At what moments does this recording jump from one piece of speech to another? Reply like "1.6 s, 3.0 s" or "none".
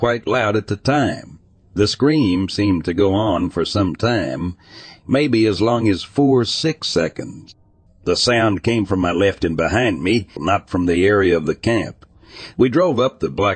7.9 s, 10.4 s, 12.5 s